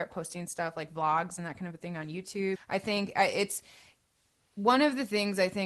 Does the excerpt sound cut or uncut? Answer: cut